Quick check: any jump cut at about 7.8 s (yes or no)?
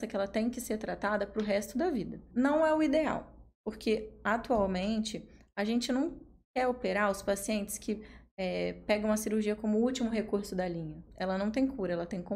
no